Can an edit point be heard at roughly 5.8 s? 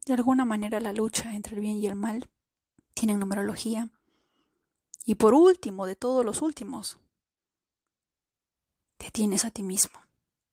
no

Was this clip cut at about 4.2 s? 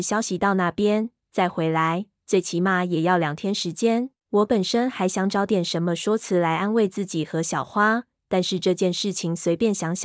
yes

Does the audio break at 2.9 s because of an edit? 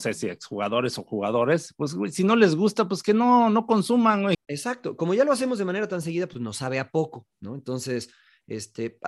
no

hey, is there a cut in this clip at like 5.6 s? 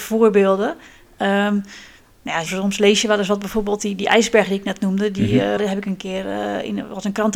yes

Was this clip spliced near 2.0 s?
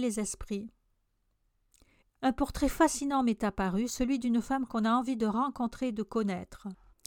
yes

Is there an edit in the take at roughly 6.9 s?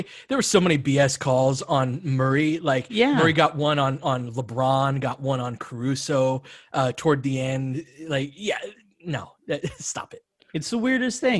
no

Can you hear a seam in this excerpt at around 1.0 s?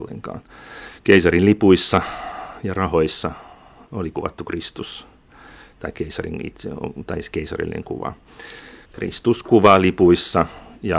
no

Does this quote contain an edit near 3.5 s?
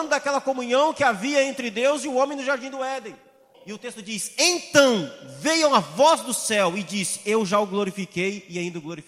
yes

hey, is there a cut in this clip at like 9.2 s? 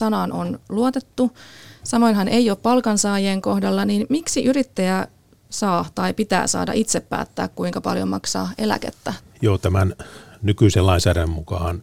yes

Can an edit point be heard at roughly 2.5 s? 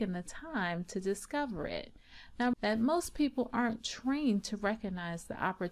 yes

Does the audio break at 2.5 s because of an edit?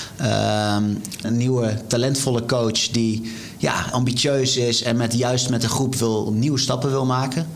no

